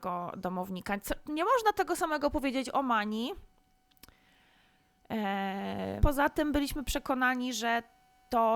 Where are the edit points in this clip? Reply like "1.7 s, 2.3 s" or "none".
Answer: 6.0 s